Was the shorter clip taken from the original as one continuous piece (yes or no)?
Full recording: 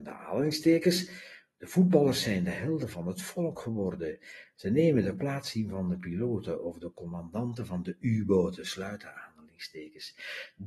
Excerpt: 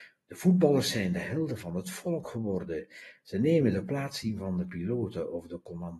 yes